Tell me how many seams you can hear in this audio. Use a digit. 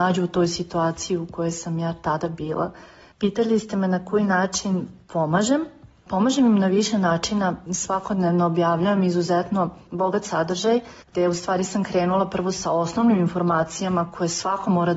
3